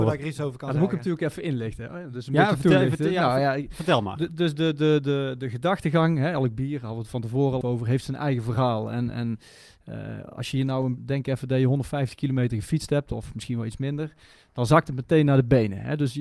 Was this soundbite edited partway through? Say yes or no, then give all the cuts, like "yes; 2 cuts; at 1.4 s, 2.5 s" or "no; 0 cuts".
yes; 2 cuts; at 7.6 s, 11.0 s